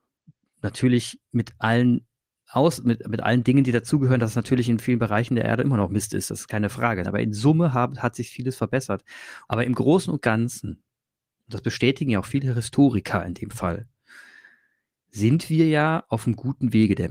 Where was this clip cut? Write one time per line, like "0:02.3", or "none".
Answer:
0:07.0
0:09.5